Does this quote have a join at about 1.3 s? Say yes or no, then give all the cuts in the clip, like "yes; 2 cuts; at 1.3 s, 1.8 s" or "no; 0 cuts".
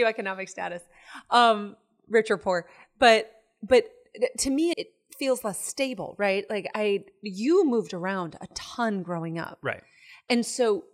no; 1 cut; at 4.7 s